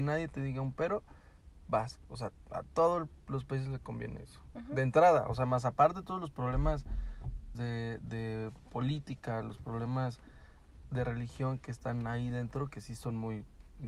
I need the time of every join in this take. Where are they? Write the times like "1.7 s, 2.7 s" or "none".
7.6 s